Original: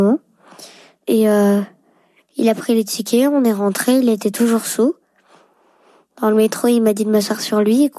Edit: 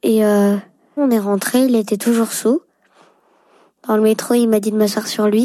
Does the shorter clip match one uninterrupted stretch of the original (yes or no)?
no